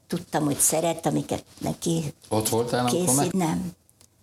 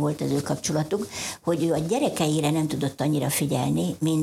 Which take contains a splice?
first; 1 cut; at 3.3 s

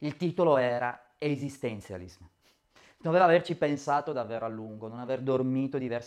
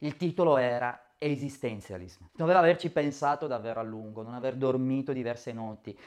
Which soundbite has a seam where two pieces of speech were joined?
second; 1 cut; at 2.3 s

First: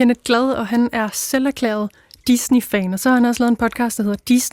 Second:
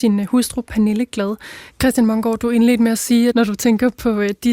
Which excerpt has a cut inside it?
second; 2 cuts; at 1.7 s, 3.3 s

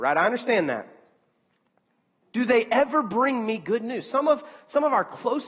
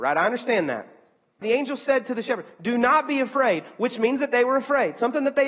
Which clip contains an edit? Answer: second; 1 cut; at 1.4 s

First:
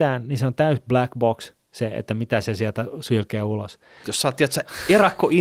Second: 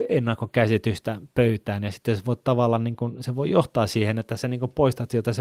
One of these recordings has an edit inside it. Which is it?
first; 1 cut; at 4.0 s

